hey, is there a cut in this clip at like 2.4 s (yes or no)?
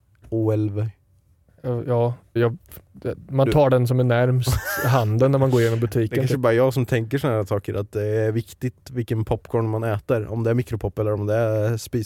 yes